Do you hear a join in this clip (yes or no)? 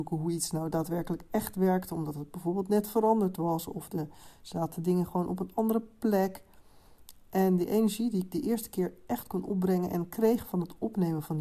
no